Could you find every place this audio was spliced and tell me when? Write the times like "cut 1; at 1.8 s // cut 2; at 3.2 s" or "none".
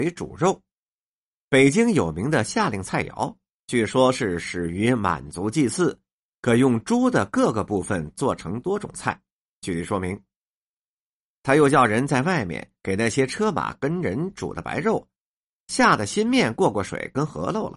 none